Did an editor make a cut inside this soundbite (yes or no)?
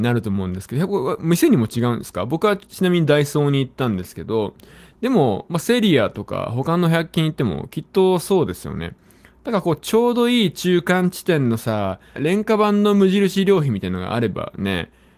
yes